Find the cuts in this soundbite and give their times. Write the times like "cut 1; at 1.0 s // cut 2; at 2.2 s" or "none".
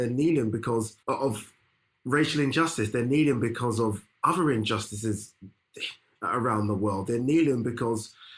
cut 1; at 1.0 s